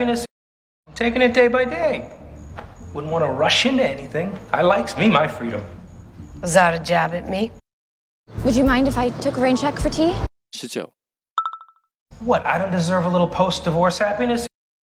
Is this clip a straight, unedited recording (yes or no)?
yes